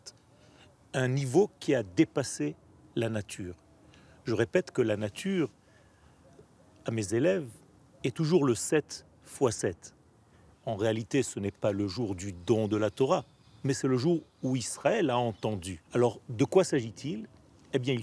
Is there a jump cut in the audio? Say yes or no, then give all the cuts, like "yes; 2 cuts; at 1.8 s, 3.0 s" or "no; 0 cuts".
yes; 2 cuts; at 10.5 s, 15.9 s